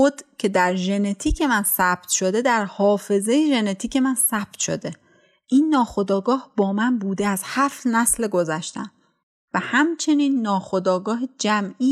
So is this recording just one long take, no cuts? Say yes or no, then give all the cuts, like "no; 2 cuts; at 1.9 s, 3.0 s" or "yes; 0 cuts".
yes; 0 cuts